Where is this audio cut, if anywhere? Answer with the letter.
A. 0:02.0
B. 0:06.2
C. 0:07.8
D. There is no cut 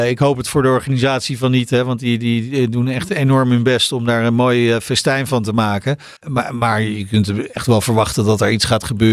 B